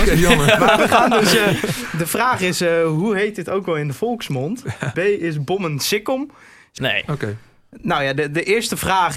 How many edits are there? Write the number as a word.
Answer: two